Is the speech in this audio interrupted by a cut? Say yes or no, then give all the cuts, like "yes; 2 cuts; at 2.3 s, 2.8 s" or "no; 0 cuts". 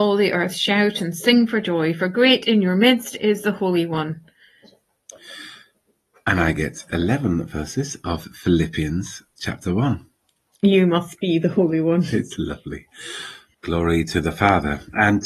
yes; 1 cut; at 13.5 s